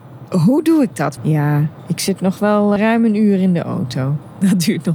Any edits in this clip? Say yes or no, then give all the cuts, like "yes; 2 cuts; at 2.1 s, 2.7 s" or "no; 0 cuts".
yes; 2 cuts; at 1.2 s, 2.8 s